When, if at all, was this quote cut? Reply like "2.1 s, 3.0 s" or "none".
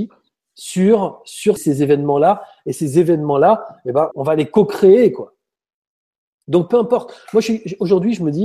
1.6 s, 4.1 s